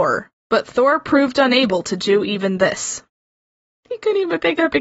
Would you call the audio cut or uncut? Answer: uncut